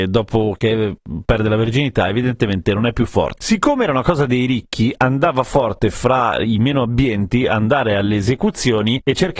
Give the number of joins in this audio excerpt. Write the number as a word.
one